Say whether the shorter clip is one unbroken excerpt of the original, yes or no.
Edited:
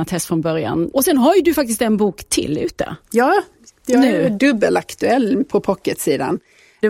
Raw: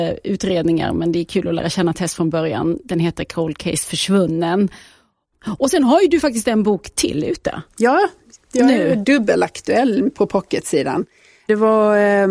no